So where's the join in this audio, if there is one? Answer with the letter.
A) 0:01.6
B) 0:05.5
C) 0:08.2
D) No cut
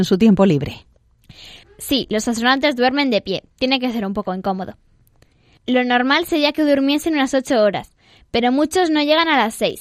A